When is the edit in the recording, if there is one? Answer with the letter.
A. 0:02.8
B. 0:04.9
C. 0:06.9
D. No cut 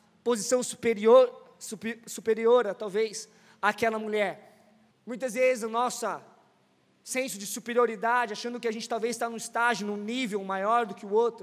B